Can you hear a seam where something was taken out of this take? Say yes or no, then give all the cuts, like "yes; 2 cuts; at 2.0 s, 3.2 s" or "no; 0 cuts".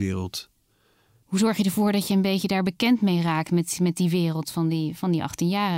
yes; 1 cut; at 1.2 s